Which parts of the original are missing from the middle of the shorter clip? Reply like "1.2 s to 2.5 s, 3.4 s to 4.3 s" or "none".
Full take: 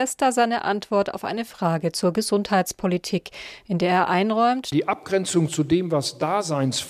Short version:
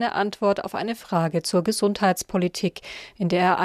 none